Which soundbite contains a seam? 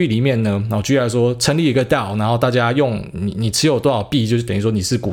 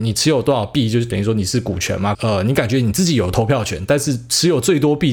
second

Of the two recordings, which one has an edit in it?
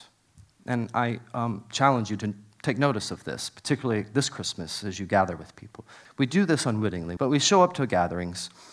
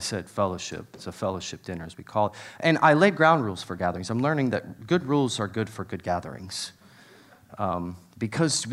first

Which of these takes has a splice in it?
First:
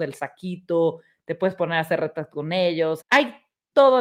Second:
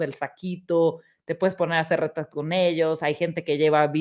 first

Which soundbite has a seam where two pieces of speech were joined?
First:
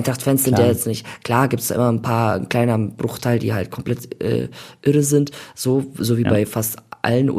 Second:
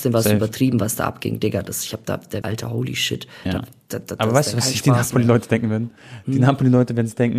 second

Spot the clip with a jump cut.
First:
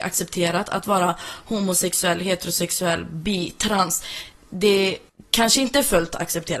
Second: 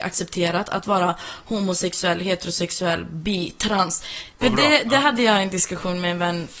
second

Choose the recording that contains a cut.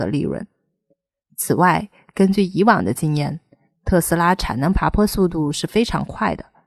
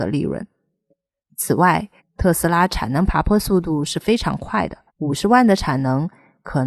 second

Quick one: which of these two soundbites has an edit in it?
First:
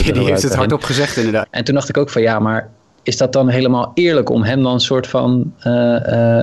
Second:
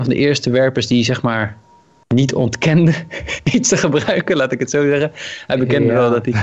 first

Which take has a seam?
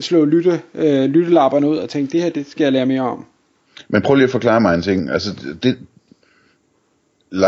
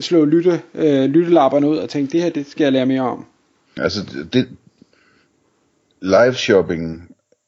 second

